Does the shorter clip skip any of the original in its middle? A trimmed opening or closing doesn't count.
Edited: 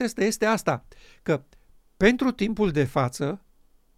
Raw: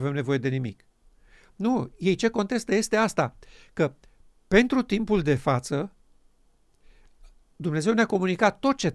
no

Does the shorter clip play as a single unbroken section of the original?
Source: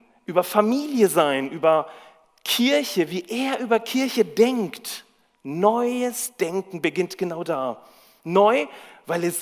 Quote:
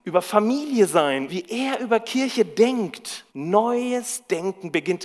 no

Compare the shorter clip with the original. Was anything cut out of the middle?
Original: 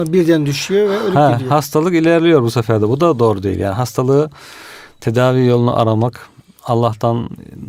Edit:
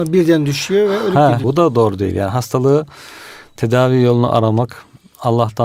yes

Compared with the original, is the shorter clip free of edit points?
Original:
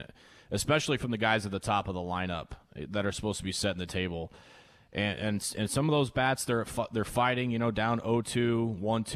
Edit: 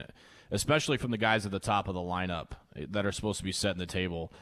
yes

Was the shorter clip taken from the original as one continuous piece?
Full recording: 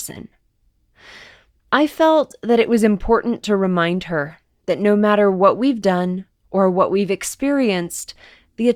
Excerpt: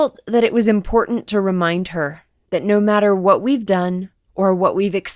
yes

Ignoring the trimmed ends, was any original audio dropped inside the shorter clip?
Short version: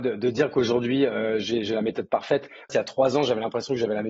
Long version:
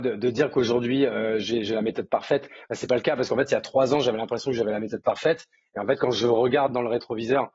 yes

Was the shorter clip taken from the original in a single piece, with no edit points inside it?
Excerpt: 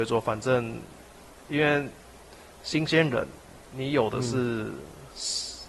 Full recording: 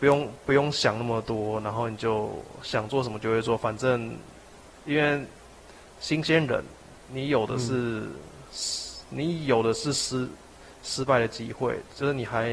yes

